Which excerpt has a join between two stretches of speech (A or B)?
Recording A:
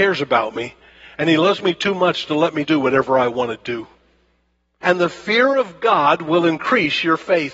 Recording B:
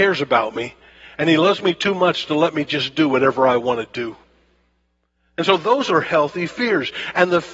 A